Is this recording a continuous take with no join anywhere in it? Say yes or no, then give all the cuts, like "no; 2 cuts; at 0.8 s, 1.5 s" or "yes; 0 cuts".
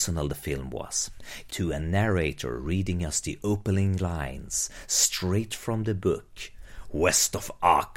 no; 1 cut; at 1.5 s